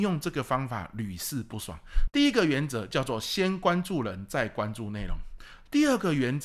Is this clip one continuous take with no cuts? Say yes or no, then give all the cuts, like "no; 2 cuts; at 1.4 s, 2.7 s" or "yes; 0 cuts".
no; 1 cut; at 2.1 s